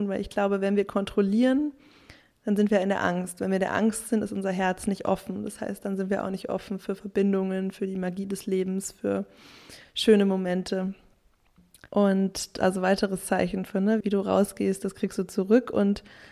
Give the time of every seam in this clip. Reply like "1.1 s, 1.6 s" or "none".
11.9 s, 14.0 s